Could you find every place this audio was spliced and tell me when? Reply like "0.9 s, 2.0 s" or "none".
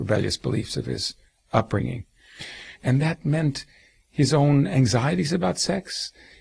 2.8 s